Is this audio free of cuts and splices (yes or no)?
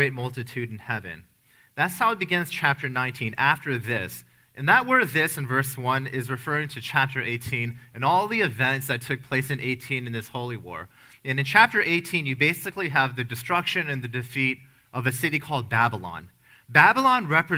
yes